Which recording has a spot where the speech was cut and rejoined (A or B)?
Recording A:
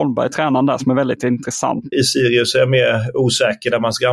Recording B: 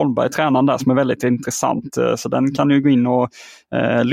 A